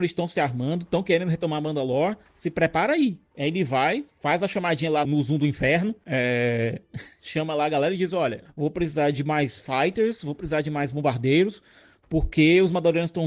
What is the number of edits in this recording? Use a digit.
2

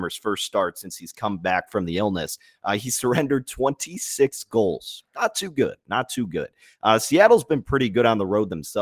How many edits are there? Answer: 0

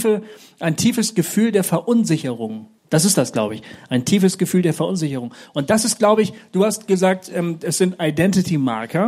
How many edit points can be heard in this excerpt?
1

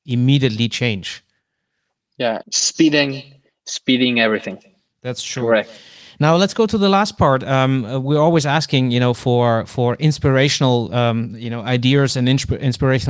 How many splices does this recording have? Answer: 1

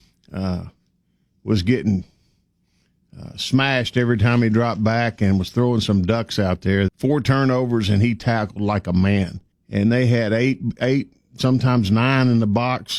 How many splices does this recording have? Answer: 2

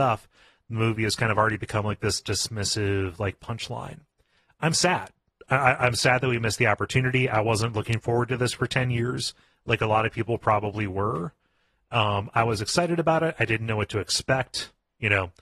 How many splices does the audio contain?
0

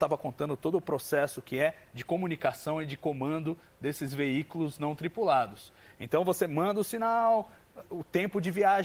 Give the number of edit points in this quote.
0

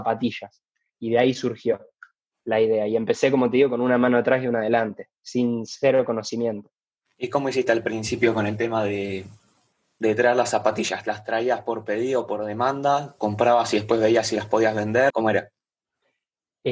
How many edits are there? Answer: 1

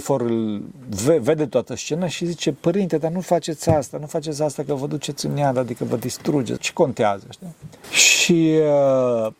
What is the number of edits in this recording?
2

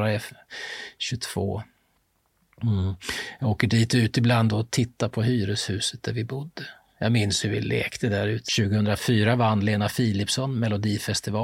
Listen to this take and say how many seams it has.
1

